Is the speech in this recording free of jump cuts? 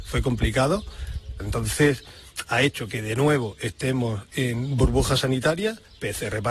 no; 1 cut; at 1.4 s

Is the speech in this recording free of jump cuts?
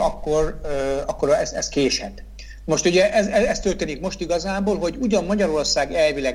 yes; 0 cuts

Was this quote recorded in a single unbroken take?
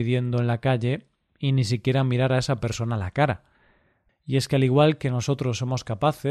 no; 1 cut; at 4.1 s

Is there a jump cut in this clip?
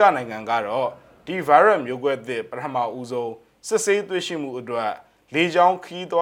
no; 0 cuts

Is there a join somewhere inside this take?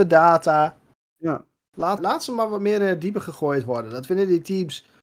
yes; 1 cut; at 2.0 s

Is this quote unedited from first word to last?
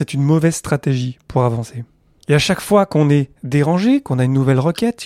no; 1 cut; at 2.2 s

